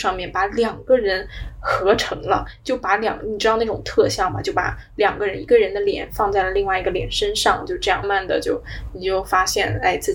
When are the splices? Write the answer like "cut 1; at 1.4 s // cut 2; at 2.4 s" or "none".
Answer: cut 1; at 8.0 s